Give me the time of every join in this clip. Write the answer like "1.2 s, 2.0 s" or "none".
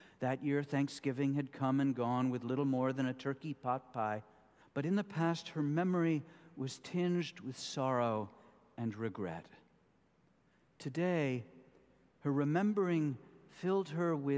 4.6 s